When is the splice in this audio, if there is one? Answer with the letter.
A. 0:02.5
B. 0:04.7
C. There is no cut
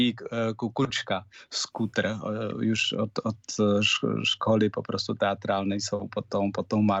C